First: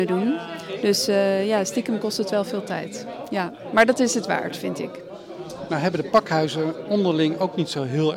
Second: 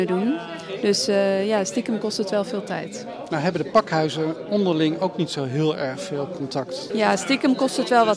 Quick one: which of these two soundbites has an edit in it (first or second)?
second